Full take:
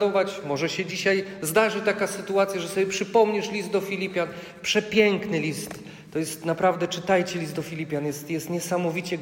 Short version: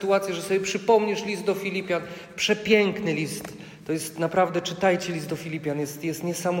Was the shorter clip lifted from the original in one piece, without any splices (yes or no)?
yes